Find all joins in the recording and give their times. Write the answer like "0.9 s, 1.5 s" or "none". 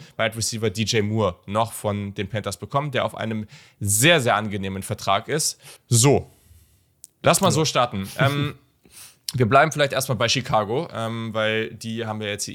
5.8 s